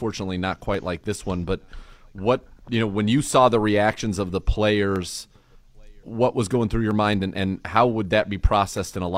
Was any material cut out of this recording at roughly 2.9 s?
no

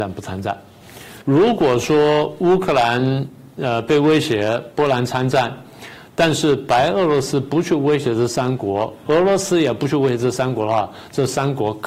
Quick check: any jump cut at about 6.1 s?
no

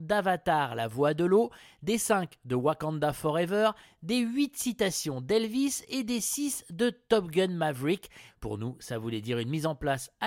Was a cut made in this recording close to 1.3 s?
no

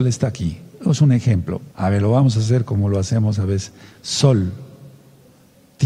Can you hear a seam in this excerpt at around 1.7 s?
yes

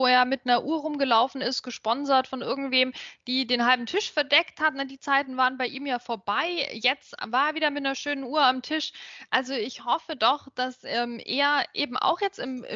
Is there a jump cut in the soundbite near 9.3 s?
no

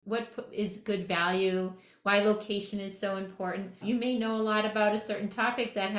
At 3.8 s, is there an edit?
yes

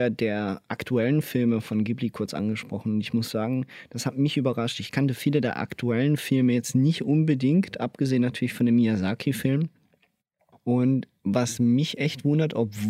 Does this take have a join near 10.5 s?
yes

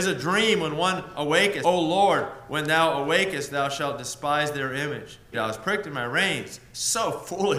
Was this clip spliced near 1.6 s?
yes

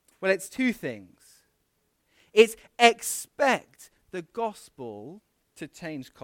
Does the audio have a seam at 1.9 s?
no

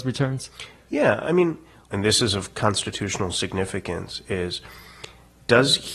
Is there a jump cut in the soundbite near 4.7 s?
no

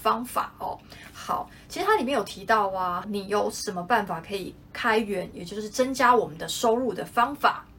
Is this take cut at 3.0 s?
yes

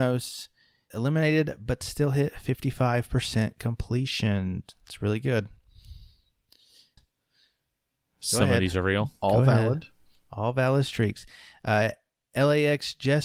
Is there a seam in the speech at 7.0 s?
yes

